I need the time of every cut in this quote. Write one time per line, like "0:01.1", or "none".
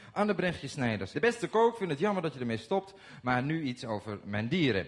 0:01.1